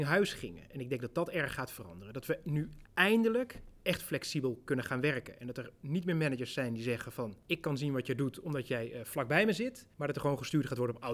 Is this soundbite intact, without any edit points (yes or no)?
no